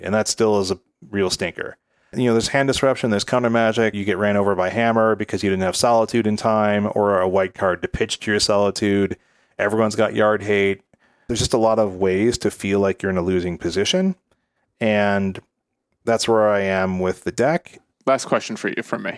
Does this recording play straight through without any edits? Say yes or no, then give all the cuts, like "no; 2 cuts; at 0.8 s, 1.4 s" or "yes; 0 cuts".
no; 3 cuts; at 3.9 s, 11.3 s, 17.9 s